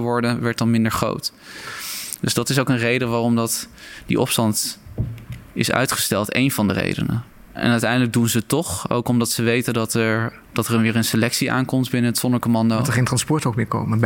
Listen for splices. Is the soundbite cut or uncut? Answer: cut